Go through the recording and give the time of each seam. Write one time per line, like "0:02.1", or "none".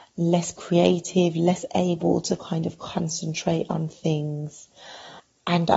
none